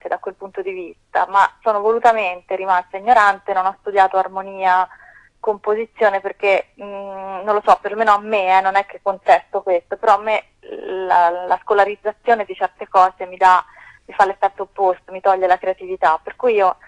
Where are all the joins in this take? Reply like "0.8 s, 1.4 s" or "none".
none